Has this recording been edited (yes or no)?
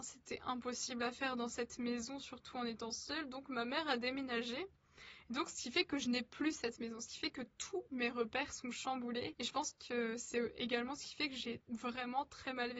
no